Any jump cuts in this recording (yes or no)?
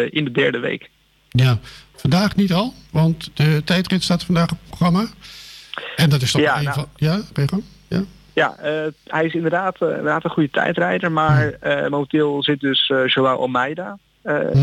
no